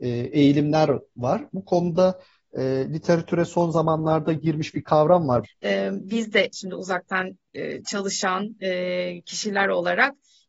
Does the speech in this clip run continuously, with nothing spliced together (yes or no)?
no